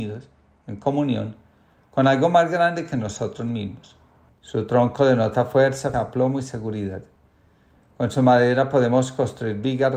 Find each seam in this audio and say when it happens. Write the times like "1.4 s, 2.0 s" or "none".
4.3 s, 5.9 s

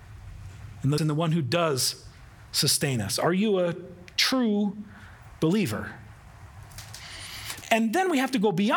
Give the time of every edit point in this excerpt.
1.0 s, 7.6 s

